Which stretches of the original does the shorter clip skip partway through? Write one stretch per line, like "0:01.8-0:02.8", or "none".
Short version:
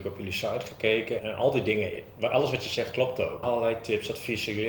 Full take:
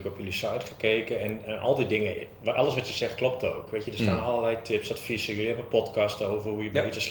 0:01.2-0:01.4
0:03.7-0:04.2